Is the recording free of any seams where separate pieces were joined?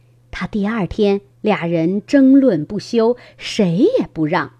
no; 1 cut; at 1.4 s

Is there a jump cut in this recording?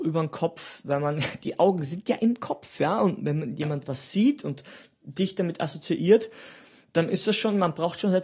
no; 0 cuts

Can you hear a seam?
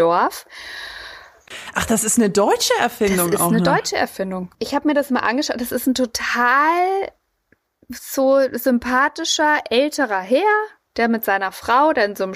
yes; 1 cut; at 4.5 s

